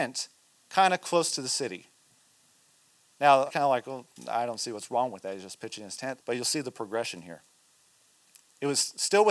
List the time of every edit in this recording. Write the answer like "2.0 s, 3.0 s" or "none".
3.5 s, 6.2 s